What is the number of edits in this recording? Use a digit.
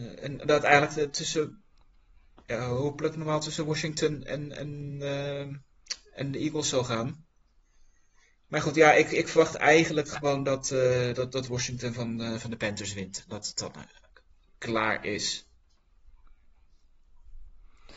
0